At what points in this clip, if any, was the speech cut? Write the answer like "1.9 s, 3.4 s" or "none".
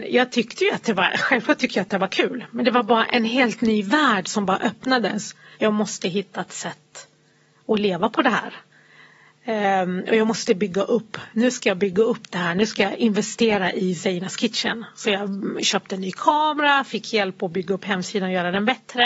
5.5 s